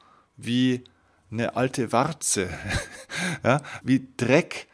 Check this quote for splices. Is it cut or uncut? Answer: cut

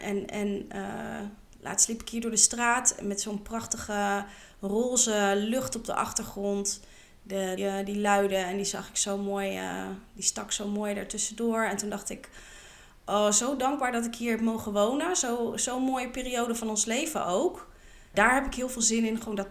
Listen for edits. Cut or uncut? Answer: cut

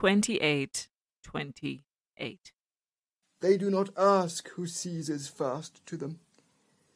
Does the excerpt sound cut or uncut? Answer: cut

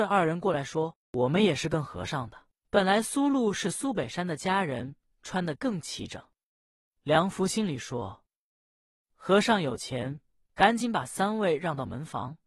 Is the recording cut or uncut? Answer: cut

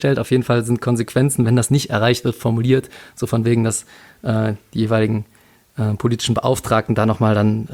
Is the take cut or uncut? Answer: uncut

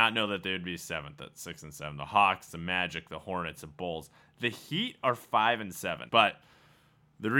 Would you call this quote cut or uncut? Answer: cut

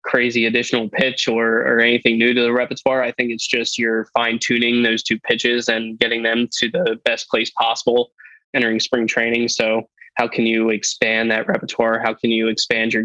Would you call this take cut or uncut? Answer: uncut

